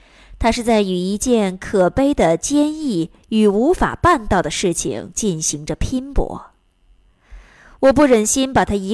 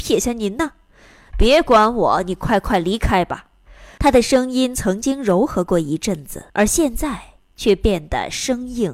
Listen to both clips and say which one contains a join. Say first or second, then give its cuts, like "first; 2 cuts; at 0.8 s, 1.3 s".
second; 2 cuts; at 4.0 s, 6.5 s